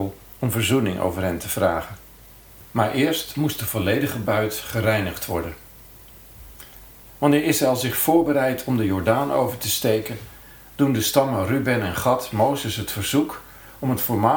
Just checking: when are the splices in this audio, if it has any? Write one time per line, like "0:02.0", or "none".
none